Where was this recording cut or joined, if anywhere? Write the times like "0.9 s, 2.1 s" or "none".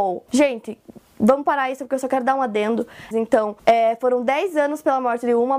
3.1 s